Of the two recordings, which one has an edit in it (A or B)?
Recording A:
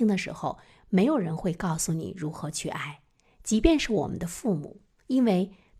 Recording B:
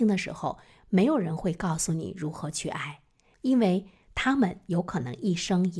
B